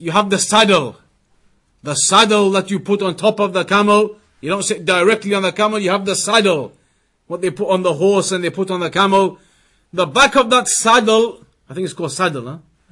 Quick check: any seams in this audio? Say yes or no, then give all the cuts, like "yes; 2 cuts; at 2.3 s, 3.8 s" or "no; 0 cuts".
no; 0 cuts